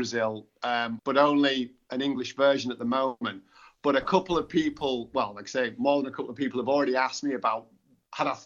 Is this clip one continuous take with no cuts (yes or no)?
no